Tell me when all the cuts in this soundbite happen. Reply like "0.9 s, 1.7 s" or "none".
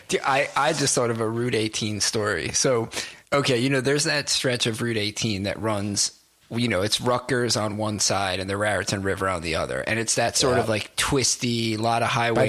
3.2 s